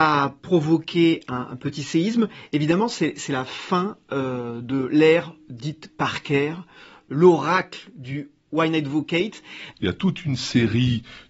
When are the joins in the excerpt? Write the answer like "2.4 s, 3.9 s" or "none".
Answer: 9.7 s